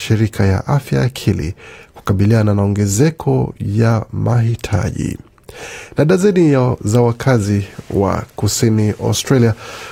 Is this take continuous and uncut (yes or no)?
yes